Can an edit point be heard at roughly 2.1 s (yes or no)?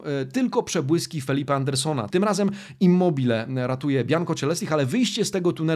yes